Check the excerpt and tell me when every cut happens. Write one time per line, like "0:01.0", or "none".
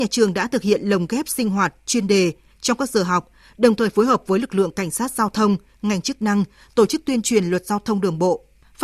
none